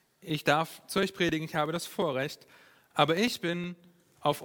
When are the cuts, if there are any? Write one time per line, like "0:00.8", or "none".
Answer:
none

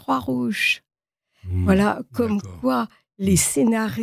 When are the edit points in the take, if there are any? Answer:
none

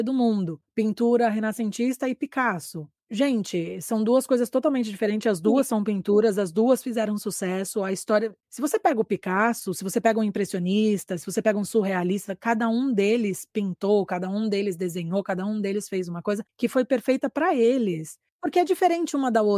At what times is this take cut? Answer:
none

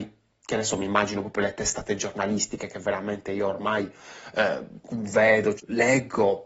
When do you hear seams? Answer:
0:05.6

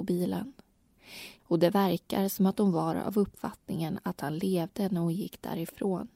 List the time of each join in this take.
0:01.4

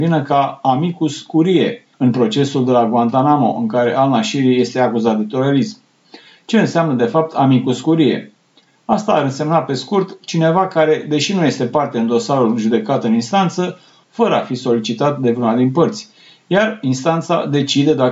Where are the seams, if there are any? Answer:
0:01.9
0:14.0

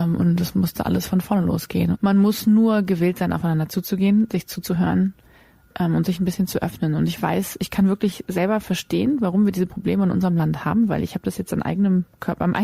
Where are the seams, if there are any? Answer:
0:01.9

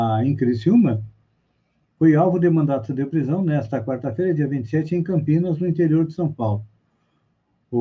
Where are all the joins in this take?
none

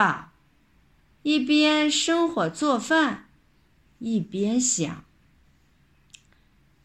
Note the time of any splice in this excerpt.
0:01.1

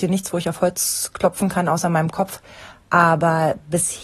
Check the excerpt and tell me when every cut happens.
none

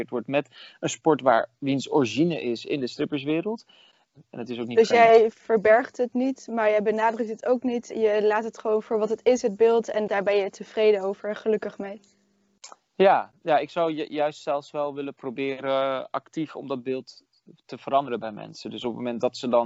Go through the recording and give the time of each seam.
none

